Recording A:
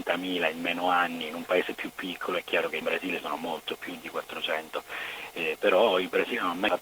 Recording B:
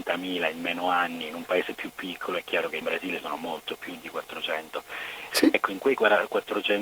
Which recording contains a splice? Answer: B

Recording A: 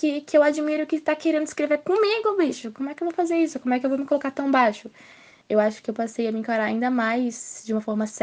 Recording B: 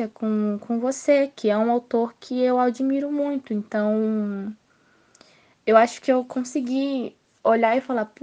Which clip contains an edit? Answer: A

